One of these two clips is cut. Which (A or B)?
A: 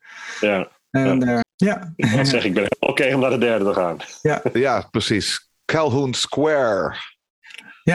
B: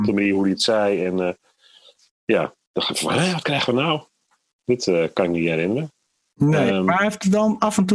A